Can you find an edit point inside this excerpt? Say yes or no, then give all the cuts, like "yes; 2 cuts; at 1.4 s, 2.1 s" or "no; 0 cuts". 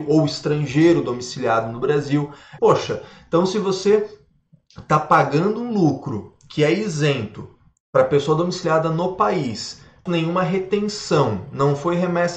yes; 2 cuts; at 2.6 s, 10.1 s